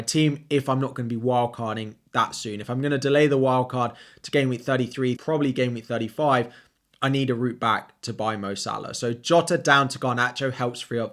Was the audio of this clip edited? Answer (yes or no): yes